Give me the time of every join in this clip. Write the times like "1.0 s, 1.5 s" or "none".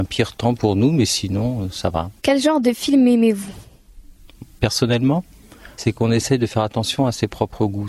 2.2 s, 5.7 s

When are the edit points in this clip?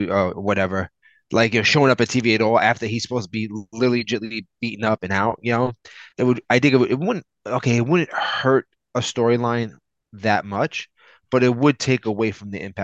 6.1 s

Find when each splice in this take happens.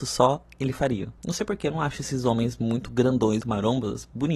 1.2 s, 3.4 s

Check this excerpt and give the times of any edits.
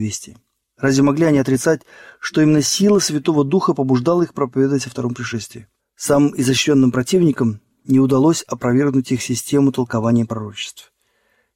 5.8 s

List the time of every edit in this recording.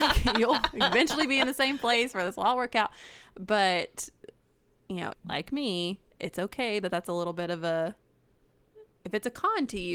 5.1 s, 8.9 s

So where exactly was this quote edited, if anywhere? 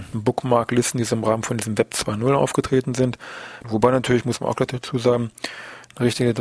3.6 s

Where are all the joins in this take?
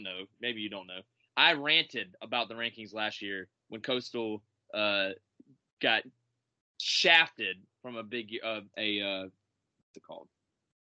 8.7 s

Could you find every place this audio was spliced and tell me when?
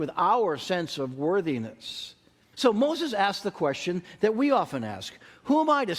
2.5 s

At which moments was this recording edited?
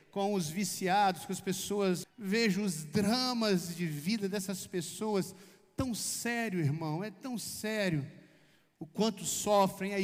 2.0 s

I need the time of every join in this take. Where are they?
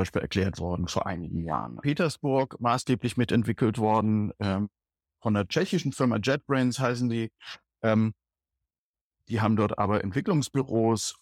1.8 s

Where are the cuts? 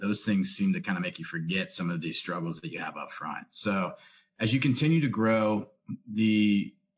none

